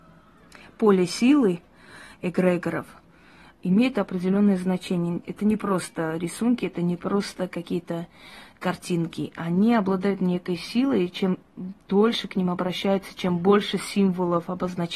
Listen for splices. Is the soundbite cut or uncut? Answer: uncut